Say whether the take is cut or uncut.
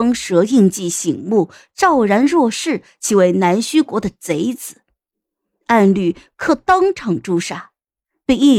uncut